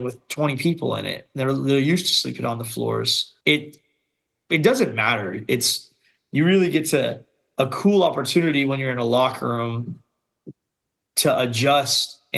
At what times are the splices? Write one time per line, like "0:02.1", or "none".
0:03.4